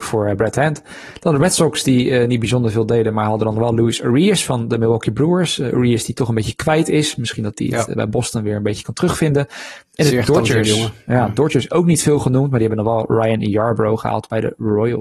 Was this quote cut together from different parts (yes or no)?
no